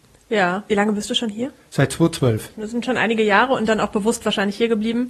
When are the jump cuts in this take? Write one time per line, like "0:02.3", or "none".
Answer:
0:02.5